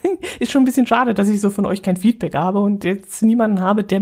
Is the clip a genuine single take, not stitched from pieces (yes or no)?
yes